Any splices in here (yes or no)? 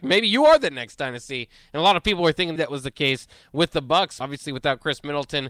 yes